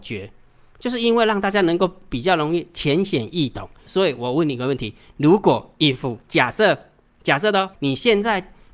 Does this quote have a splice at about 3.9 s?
yes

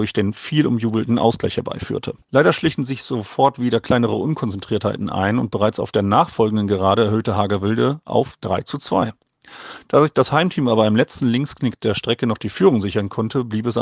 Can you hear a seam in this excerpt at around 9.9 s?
no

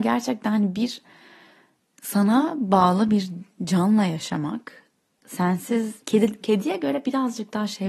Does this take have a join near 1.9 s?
no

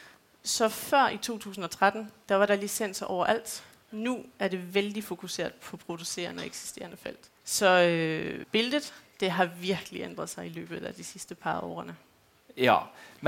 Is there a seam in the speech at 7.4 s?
yes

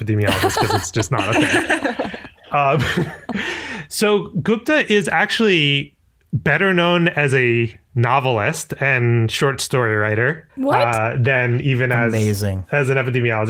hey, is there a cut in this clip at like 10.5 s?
yes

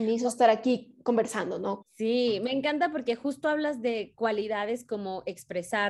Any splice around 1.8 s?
yes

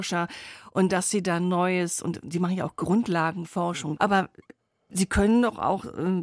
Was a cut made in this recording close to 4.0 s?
yes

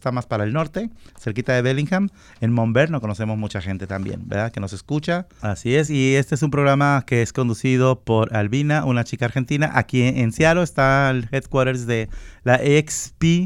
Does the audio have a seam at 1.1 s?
no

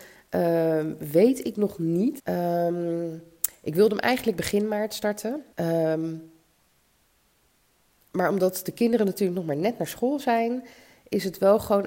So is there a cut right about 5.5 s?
yes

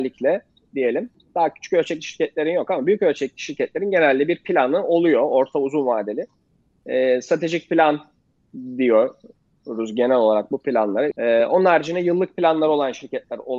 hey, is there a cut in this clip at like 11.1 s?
yes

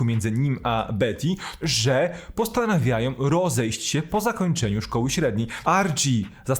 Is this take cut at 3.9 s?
no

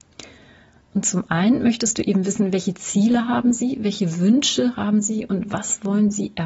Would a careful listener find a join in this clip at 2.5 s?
no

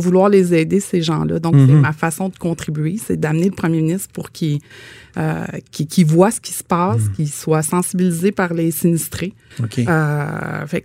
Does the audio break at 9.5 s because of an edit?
yes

